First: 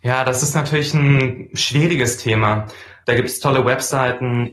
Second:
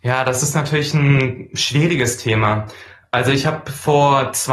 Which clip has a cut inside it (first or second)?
first